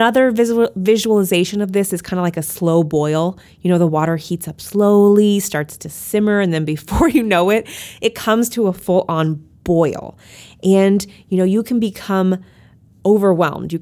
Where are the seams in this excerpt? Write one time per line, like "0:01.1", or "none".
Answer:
none

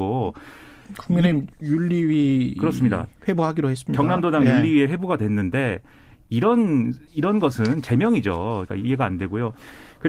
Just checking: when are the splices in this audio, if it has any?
0:07.1
0:08.7

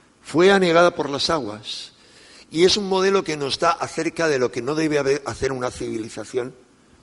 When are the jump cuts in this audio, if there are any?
none

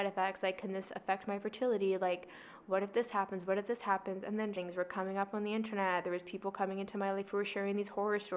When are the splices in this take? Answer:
0:04.5

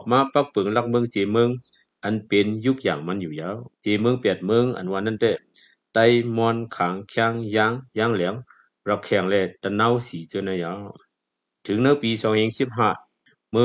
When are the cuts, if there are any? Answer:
0:03.7

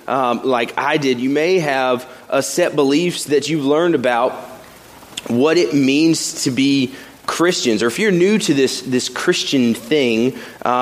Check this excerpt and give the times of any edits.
none

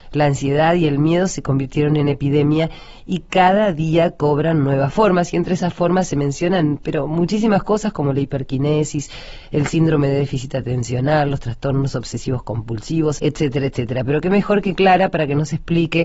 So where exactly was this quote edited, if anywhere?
0:13.2

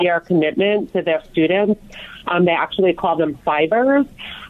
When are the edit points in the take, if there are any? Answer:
none

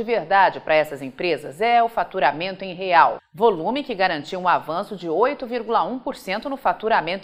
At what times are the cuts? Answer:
0:03.2

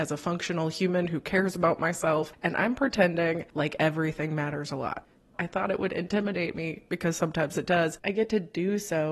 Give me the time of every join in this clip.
0:05.3
0:08.0

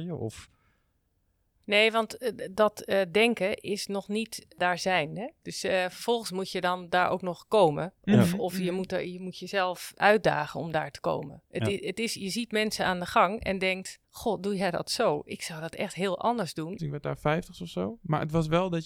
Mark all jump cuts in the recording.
0:14.0
0:16.8

